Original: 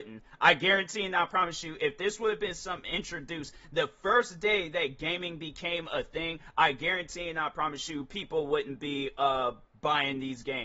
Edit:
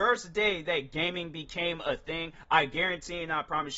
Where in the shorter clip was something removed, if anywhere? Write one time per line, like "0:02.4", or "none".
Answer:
none